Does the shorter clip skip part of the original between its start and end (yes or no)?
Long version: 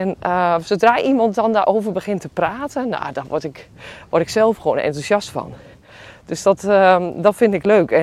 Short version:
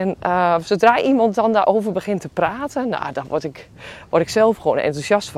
no